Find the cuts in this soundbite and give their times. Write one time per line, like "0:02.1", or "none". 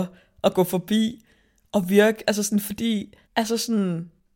0:03.2